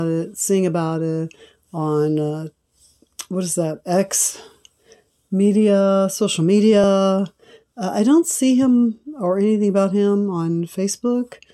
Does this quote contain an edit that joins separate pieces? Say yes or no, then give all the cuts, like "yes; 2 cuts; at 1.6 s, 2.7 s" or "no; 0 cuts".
no; 0 cuts